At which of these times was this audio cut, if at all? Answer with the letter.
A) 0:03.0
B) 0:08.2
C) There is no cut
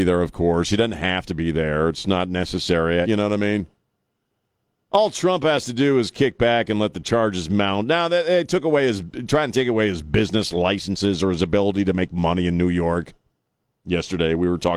A